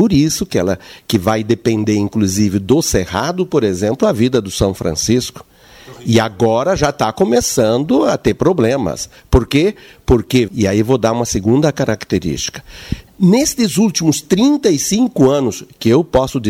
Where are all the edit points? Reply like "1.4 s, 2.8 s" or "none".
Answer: 10.5 s, 13.1 s